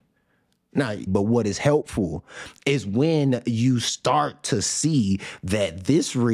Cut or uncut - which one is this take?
cut